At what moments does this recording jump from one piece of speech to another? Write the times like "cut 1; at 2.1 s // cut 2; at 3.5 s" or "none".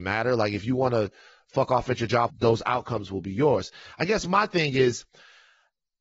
cut 1; at 2.3 s